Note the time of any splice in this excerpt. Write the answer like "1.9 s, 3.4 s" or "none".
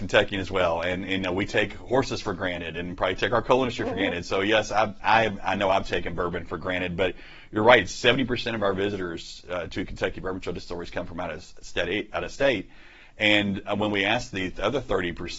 none